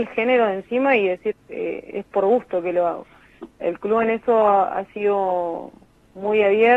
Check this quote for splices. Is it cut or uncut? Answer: cut